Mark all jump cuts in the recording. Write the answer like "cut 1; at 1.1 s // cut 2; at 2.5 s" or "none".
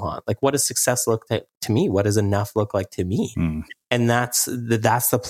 none